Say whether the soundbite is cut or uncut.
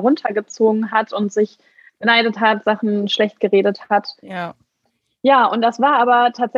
uncut